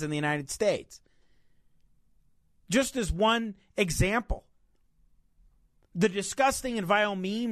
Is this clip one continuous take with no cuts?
yes; 0 cuts

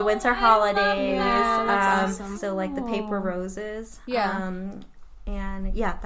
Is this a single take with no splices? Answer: no; 1 cut; at 2.3 s

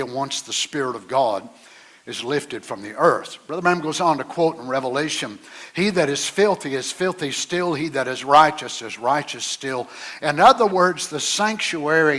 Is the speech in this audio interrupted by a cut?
no; 0 cuts

